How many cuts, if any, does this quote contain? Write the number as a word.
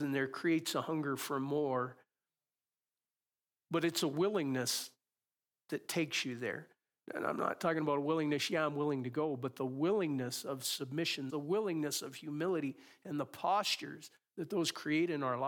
one